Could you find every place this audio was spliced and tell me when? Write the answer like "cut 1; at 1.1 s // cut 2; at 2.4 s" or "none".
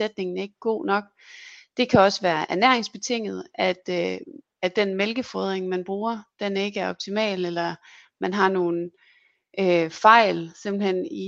none